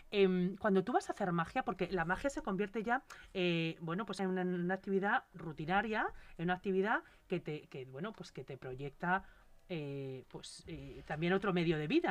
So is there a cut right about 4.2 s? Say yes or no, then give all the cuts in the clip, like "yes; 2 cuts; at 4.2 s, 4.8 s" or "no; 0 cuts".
yes; 2 cuts; at 4.2 s, 10.2 s